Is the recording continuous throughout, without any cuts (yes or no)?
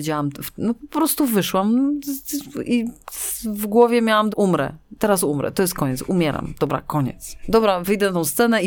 no